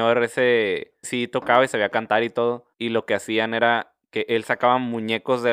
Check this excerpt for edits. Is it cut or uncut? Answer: cut